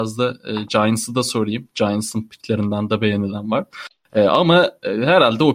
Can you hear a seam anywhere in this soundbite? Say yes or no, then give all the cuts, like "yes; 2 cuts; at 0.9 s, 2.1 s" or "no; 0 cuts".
no; 0 cuts